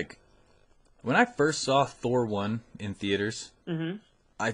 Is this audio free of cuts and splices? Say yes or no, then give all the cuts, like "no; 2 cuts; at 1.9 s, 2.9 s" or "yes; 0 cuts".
no; 1 cut; at 3.6 s